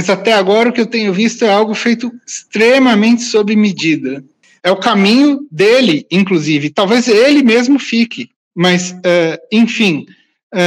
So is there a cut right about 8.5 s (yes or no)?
yes